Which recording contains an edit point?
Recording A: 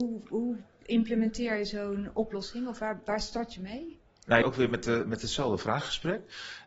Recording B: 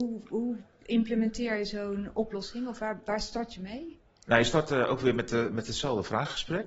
A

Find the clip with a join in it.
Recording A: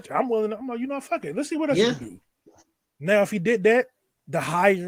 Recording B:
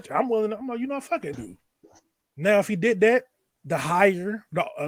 B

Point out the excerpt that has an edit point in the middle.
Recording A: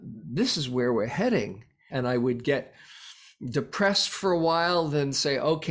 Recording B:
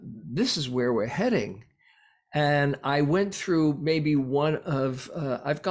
A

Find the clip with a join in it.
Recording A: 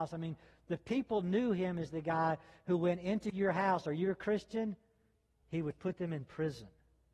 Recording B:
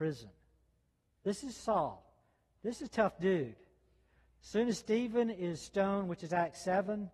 A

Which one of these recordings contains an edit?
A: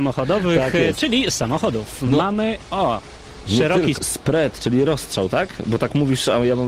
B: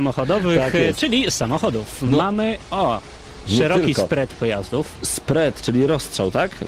A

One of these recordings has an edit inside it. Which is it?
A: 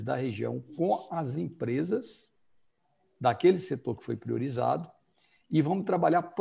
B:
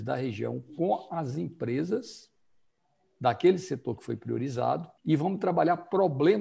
B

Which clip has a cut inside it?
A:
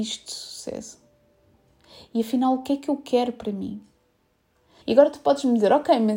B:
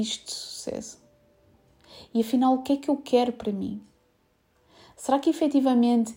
A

